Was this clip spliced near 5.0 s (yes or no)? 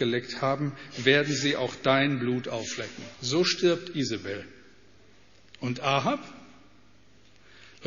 no